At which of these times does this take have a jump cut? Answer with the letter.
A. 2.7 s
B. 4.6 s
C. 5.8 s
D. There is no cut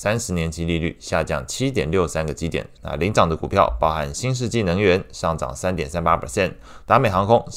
A